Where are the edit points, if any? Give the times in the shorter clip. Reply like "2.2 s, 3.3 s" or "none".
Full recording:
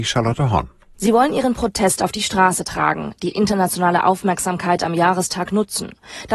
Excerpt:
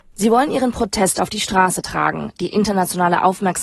none